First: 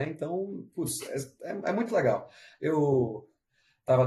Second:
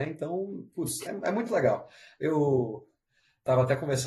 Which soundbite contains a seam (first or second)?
second